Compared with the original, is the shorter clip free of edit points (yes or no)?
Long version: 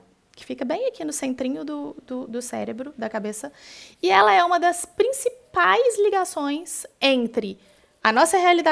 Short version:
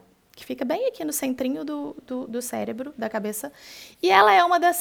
yes